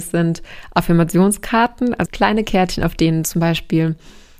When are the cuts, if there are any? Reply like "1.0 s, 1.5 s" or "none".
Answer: 2.1 s